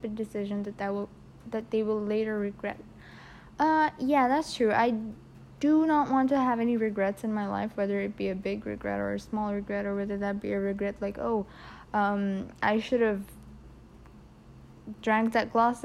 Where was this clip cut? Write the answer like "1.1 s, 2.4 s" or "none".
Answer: none